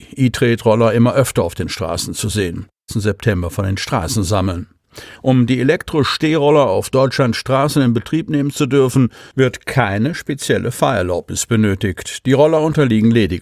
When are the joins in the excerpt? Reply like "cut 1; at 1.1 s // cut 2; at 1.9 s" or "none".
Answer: cut 1; at 2.9 s // cut 2; at 5.1 s